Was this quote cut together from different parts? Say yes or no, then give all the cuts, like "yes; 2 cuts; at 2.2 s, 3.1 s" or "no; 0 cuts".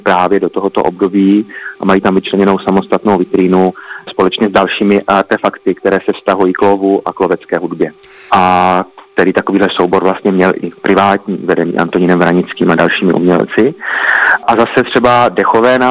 yes; 1 cut; at 8.3 s